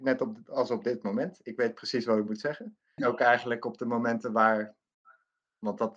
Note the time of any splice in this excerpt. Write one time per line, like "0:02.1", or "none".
0:03.0